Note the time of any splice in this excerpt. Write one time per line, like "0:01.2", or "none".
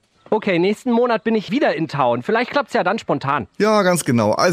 0:01.5